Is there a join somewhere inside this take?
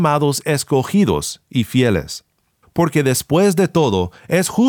yes; 1 cut; at 2.6 s

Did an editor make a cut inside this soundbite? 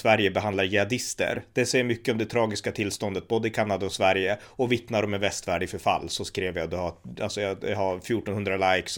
no; 0 cuts

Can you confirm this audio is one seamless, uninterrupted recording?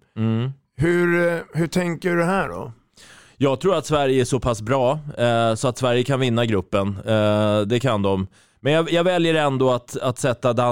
yes; 0 cuts

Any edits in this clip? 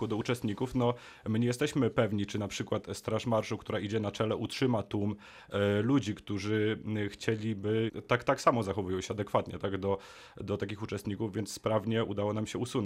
no; 0 cuts

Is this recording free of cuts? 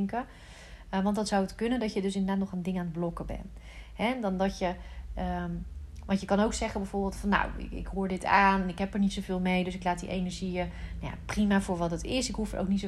yes; 0 cuts

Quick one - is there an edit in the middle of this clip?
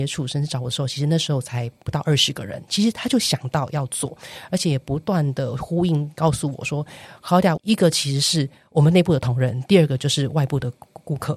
yes; 1 cut; at 7.6 s

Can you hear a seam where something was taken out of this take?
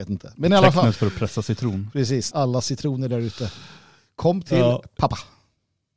yes; 1 cut; at 2.3 s

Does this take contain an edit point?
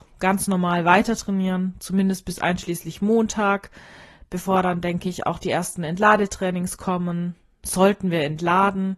no; 0 cuts

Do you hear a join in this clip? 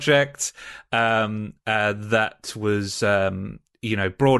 no; 0 cuts

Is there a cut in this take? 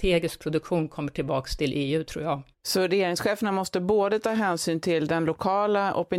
yes; 1 cut; at 2.5 s

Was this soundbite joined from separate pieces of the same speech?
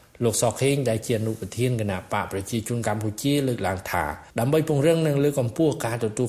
yes; 1 cut; at 4.3 s

